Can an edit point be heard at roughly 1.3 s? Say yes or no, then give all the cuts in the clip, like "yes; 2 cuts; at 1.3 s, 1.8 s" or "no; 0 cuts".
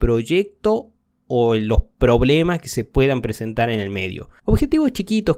no; 1 cut; at 4.4 s